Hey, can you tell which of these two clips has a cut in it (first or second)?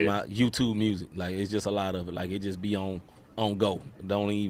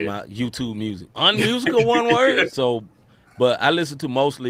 second